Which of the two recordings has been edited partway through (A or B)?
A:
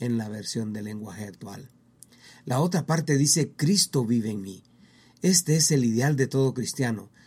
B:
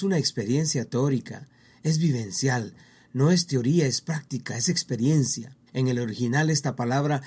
B